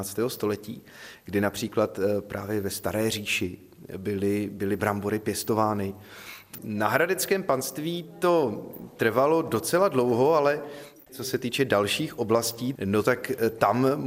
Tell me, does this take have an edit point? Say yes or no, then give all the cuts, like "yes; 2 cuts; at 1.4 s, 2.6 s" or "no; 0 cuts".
yes; 2 cuts; at 6.6 s, 12.8 s